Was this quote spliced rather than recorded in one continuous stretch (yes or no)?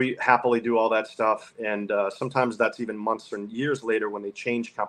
no